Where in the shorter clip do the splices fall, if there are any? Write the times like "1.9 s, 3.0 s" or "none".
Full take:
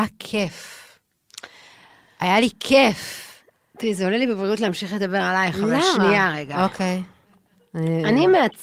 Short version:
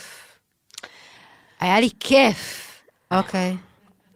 3.1 s